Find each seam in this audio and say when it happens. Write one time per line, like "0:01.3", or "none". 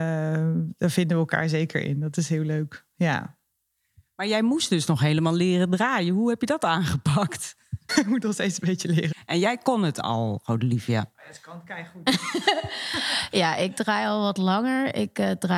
0:07.9
0:09.1